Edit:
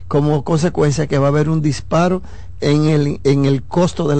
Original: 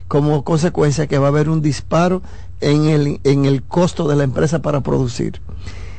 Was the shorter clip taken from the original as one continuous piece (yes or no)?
yes